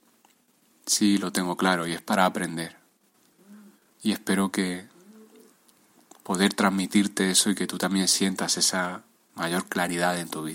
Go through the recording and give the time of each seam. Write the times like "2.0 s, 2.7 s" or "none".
3.9 s